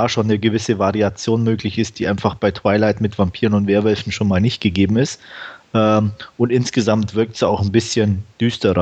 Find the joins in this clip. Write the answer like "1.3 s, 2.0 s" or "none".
none

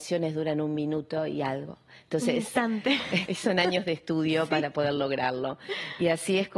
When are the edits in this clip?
3.3 s

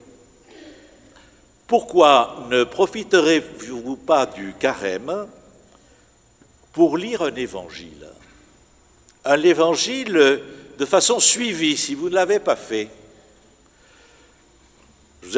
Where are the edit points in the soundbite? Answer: none

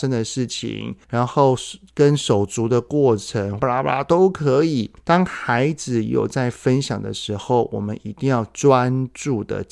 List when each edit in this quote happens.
3.6 s

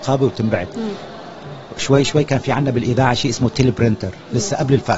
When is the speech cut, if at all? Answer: none

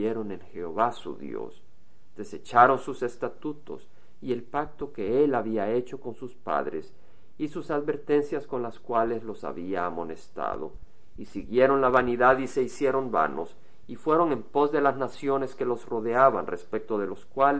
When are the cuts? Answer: none

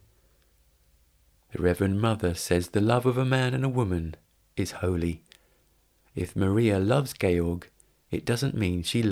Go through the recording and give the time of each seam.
1.3 s

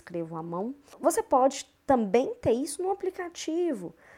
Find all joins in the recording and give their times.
0.9 s

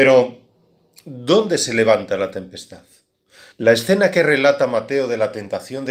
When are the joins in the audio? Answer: 3.5 s

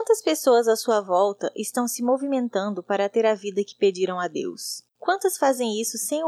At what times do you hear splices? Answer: 4.9 s

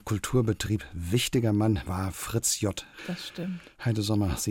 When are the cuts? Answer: 1.9 s, 3.0 s

